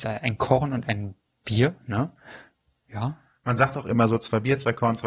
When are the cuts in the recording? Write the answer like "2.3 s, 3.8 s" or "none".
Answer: none